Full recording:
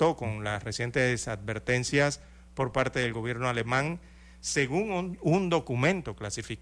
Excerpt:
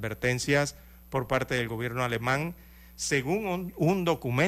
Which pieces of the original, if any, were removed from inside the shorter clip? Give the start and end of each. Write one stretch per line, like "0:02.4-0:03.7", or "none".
none